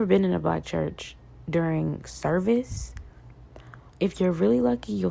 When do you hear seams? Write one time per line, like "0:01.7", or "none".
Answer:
0:03.9